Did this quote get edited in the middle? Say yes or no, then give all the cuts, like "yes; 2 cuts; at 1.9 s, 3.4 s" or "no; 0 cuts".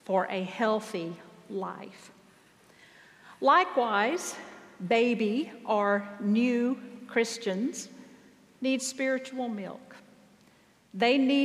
no; 0 cuts